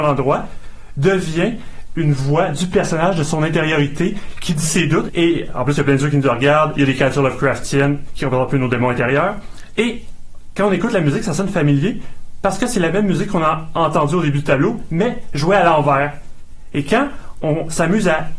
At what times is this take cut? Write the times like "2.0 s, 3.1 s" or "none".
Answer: 5.1 s